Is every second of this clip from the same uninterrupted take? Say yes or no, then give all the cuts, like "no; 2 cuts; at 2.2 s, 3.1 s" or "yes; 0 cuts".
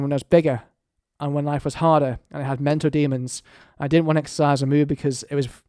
yes; 0 cuts